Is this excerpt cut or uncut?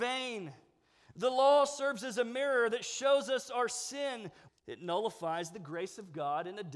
cut